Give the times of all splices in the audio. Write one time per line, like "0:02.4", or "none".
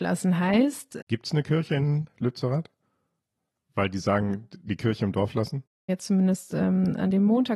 0:01.0
0:05.9